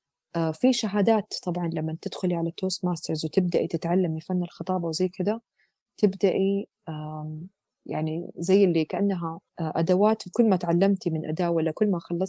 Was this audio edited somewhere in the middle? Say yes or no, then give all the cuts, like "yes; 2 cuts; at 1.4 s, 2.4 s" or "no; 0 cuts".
yes; 1 cut; at 9.5 s